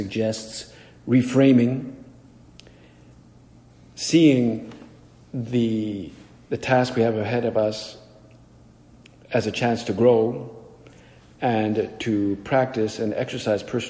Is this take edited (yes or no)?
yes